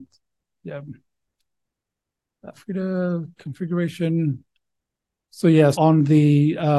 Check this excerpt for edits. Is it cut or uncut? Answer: cut